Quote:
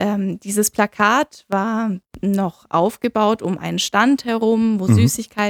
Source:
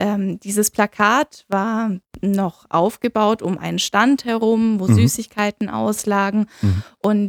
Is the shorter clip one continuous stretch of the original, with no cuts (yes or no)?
yes